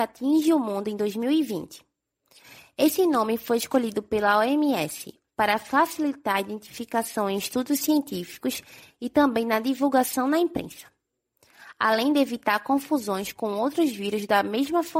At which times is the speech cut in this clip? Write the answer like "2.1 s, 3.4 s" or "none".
5.2 s